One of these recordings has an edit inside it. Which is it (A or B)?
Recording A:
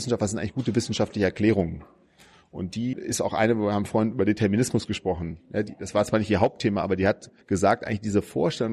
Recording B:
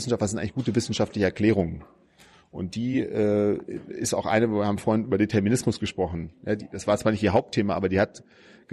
A